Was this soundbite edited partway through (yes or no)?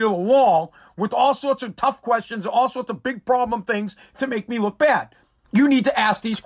yes